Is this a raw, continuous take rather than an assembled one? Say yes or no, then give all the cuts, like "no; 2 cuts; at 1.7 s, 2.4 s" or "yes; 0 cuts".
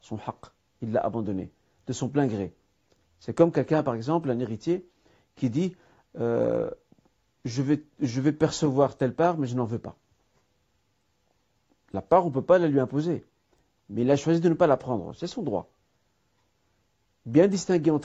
yes; 0 cuts